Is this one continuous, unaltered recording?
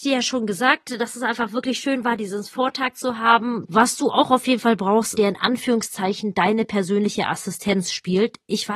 no; 2 cuts; at 3.6 s, 5.1 s

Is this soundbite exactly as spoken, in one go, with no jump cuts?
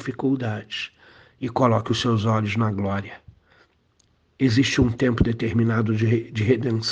yes; 0 cuts

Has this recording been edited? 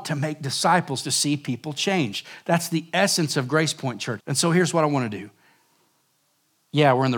yes; 1 cut; at 4.2 s

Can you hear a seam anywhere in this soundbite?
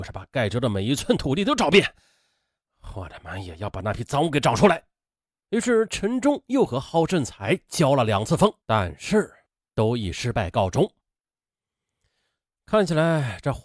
yes; 2 cuts; at 5.1 s, 8.6 s

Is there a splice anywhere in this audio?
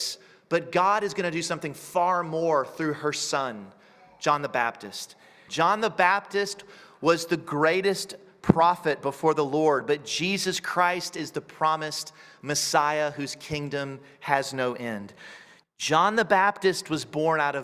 yes; 2 cuts; at 5.5 s, 15.6 s

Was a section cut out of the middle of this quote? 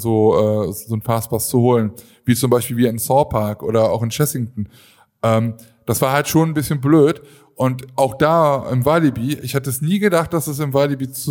no; 0 cuts

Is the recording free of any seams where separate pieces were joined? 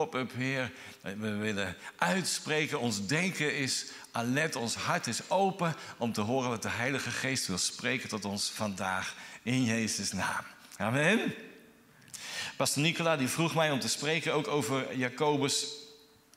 yes; 0 cuts

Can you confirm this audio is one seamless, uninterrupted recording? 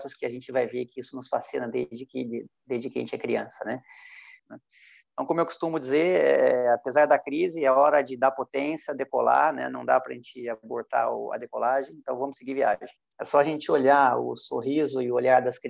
no; 2 cuts; at 4.4 s, 13.1 s

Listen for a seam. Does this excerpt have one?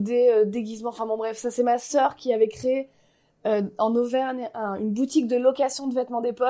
no; 0 cuts

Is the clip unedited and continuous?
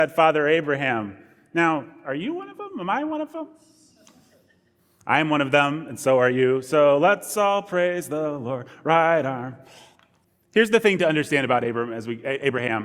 yes; 0 cuts

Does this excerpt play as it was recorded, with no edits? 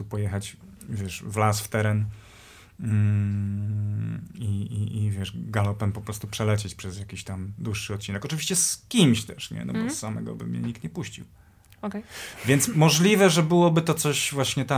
yes; 0 cuts

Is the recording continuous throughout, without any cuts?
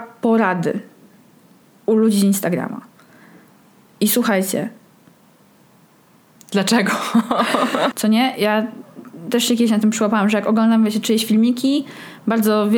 no; 1 cut; at 7.9 s

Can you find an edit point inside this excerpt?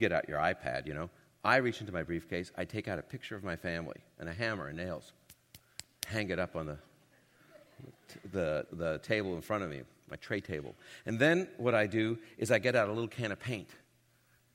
yes; 1 cut; at 8.7 s

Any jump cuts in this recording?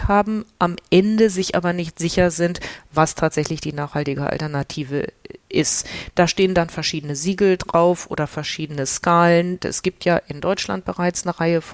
yes; 1 cut; at 9.6 s

